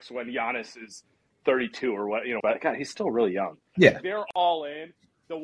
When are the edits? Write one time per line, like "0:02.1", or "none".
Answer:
0:02.4
0:03.8